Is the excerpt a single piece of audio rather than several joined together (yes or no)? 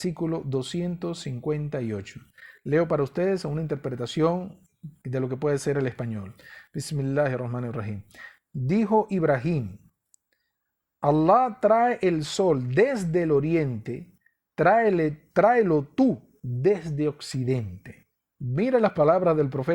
yes